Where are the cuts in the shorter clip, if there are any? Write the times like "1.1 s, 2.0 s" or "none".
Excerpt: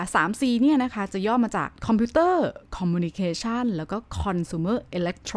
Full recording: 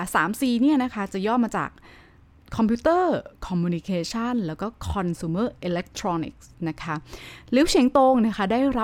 1.8 s

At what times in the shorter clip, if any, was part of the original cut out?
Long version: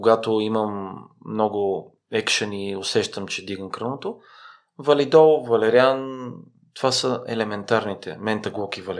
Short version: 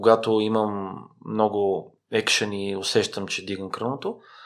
none

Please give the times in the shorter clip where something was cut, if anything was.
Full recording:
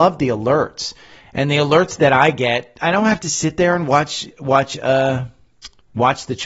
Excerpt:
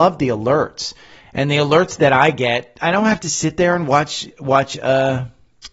none

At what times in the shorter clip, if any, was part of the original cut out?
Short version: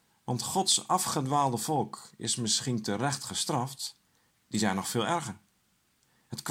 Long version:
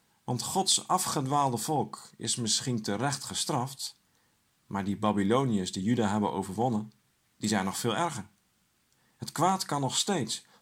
4.3 s

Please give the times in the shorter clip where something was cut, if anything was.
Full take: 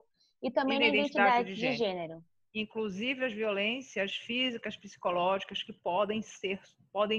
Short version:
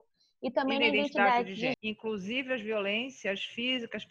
1.7 s

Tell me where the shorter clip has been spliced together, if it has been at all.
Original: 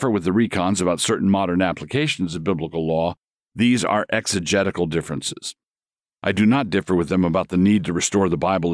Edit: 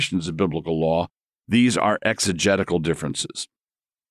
none

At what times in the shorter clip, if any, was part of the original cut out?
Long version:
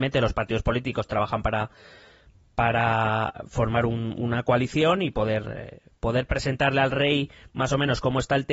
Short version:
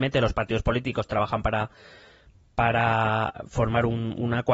none

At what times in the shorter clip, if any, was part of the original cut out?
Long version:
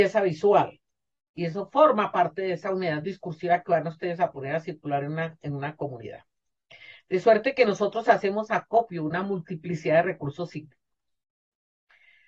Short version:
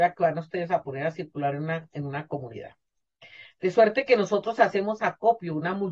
none

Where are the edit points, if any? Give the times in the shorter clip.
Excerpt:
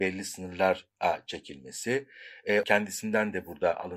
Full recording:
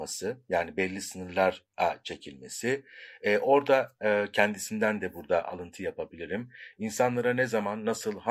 2.6 s

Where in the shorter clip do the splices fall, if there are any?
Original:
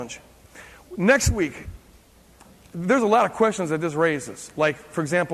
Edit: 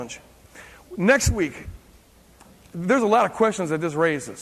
none

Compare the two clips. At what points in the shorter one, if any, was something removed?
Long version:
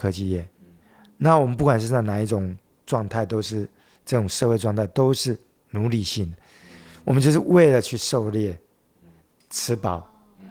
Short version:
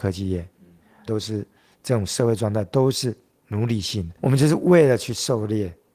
1.1 s, 4.2 s

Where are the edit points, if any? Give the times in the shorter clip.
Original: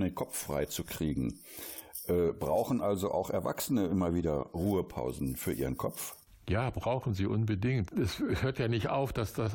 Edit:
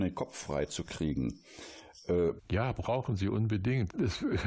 2.4 s

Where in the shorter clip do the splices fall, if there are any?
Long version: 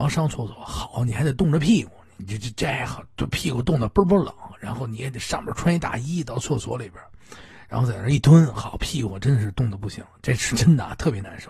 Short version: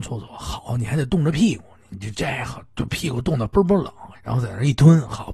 2.1 s, 4.1 s

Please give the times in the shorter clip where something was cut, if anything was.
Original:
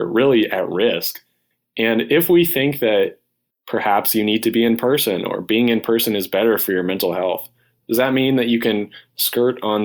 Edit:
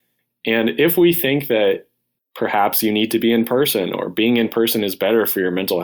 none

